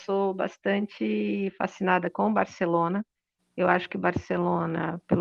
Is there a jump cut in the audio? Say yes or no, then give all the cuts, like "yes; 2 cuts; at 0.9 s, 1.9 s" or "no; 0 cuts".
no; 0 cuts